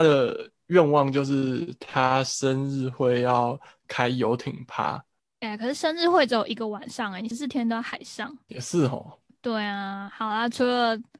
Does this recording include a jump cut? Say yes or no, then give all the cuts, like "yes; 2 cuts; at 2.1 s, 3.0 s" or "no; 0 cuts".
no; 0 cuts